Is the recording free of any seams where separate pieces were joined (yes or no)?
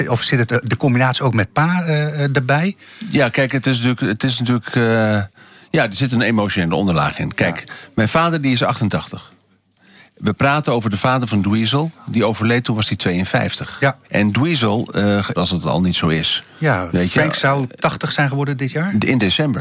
no